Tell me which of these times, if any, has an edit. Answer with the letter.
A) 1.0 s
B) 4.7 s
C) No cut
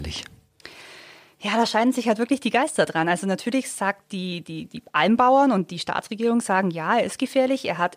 B